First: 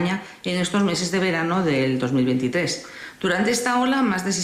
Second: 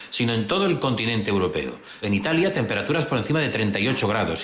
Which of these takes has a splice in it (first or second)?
second